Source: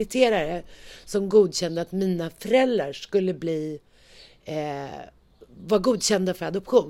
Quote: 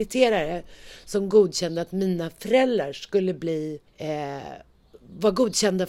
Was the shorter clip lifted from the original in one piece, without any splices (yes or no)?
no